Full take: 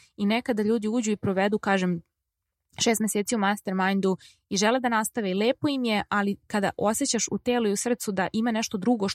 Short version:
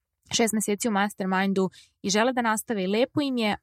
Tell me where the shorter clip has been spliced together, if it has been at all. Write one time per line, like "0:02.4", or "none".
none